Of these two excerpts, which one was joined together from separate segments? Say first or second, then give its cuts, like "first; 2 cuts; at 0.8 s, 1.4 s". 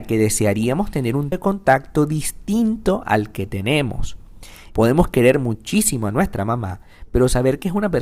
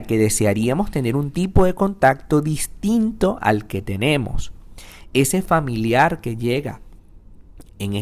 first; 2 cuts; at 1.3 s, 4.7 s